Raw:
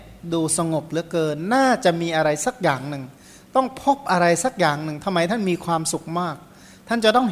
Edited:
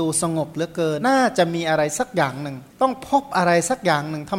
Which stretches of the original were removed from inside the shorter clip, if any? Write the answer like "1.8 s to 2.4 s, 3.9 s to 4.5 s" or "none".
1.4 s to 1.5 s, 3.2 s to 3.4 s